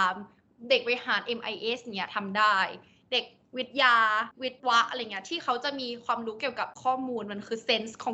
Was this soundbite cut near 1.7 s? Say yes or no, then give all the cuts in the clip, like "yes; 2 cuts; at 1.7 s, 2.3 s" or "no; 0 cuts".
no; 1 cut; at 4.6 s